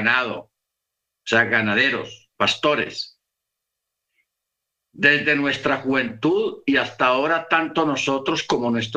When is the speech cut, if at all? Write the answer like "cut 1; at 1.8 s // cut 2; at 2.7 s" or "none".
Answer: none